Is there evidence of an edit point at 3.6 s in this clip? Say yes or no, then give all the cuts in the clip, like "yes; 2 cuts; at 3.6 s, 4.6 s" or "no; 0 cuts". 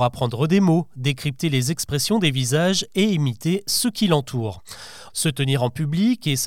no; 1 cut; at 5.1 s